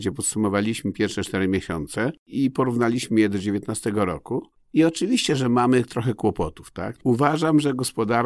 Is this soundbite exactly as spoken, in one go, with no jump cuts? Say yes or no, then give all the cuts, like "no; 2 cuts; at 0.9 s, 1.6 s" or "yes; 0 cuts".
no; 1 cut; at 7.0 s